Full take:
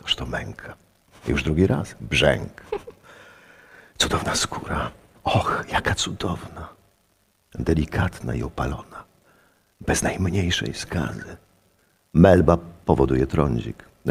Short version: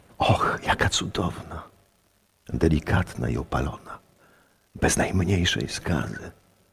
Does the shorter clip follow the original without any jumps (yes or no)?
yes